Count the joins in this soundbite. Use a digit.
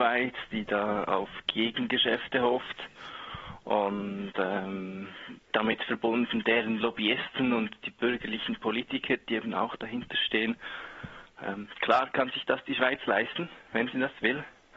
1